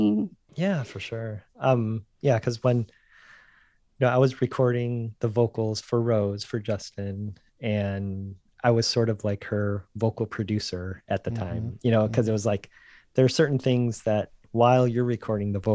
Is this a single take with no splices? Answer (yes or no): yes